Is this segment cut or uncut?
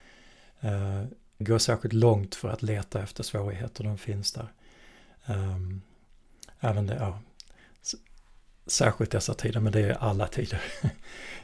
cut